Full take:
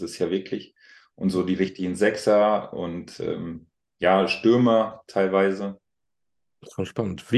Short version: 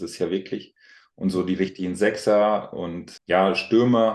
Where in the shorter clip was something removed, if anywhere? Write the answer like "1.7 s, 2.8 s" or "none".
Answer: 3.2 s